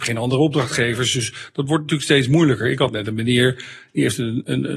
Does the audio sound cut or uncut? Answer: uncut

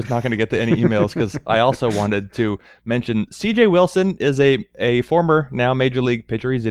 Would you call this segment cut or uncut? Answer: uncut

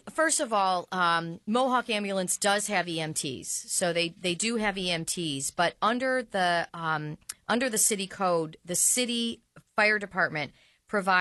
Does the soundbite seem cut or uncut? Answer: uncut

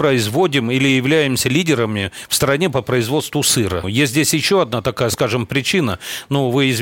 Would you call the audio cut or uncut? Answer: cut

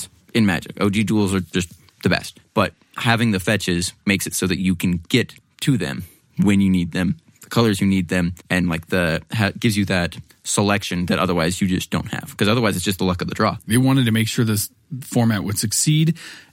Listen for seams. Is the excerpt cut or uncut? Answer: cut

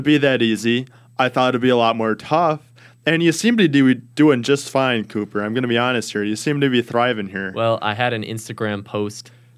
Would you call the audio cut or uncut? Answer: uncut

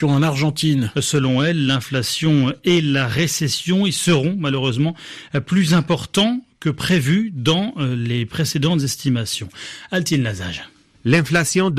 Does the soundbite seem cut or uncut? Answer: cut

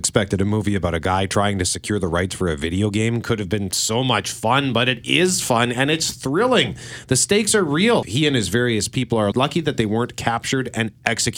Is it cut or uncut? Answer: cut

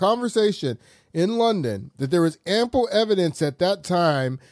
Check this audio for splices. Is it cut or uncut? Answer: uncut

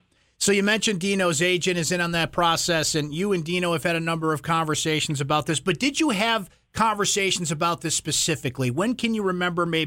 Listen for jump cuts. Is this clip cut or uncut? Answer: uncut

